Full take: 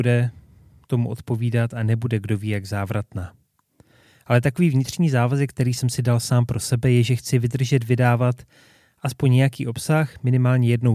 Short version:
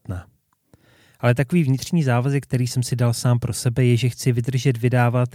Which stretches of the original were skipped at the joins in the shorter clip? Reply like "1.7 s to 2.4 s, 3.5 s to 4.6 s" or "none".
none

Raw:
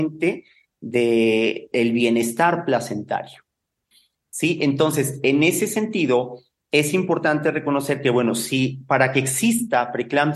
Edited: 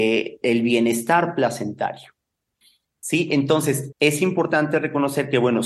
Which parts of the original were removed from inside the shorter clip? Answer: 5.2 s to 6.6 s

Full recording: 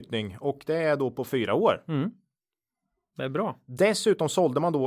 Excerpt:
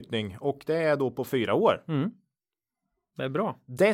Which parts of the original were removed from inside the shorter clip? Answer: none

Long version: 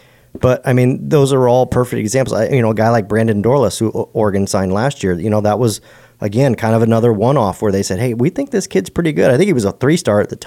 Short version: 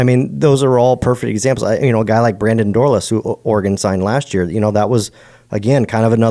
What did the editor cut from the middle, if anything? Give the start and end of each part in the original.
none

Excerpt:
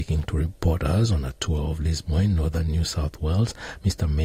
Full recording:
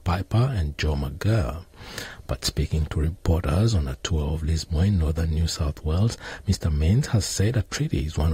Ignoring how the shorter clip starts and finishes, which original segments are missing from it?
none

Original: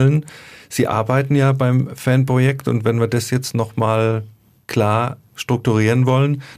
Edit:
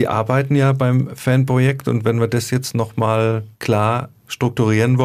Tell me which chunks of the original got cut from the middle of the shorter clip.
4.3 s to 4.6 s

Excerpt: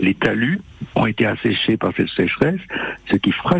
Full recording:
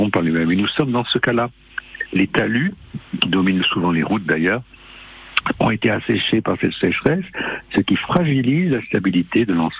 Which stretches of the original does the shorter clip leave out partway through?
3.1 s to 5.6 s

